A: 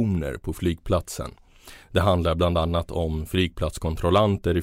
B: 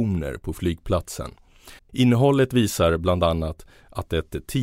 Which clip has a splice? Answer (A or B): B